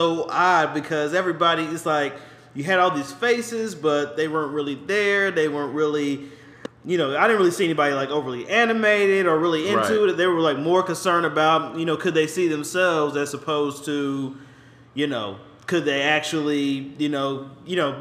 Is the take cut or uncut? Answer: uncut